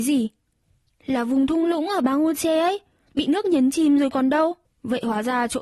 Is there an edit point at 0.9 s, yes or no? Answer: no